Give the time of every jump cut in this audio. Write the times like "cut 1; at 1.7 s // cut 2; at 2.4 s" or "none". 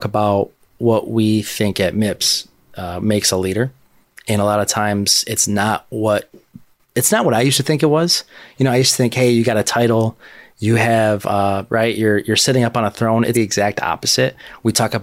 cut 1; at 11.7 s // cut 2; at 13.3 s